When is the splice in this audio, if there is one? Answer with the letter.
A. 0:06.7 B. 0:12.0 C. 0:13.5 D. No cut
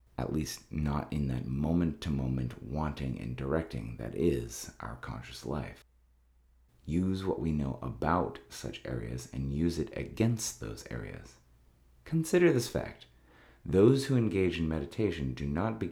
A